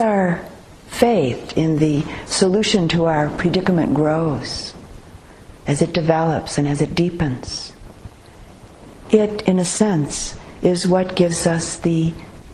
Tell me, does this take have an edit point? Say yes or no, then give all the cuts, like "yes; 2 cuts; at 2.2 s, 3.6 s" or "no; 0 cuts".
no; 0 cuts